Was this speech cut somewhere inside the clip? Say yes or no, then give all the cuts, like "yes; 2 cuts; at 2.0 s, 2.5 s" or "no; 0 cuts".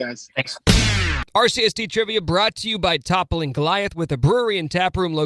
no; 0 cuts